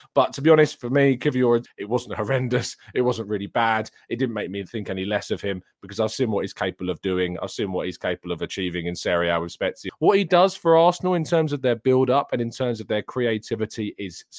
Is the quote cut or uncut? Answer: cut